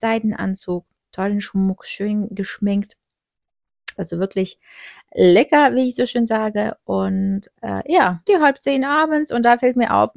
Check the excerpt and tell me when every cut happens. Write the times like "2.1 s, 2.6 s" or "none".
4.0 s, 8.3 s